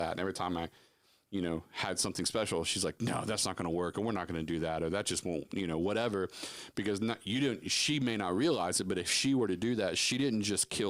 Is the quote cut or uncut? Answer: uncut